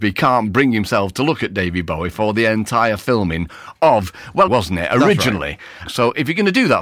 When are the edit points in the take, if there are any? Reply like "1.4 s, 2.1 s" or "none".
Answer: 4.5 s, 5.9 s